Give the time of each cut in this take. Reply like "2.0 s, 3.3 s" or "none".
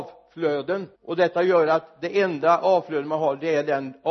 0.9 s